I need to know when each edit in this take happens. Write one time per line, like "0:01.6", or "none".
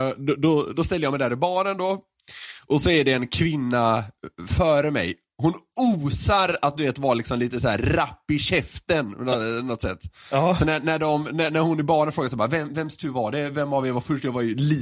none